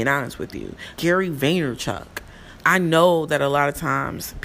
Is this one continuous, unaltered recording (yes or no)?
no